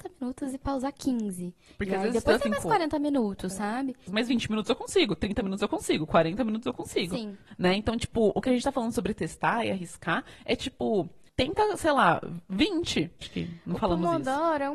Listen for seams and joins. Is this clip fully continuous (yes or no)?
no